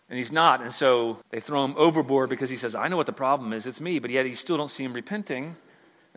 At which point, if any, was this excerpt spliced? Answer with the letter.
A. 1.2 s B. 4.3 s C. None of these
A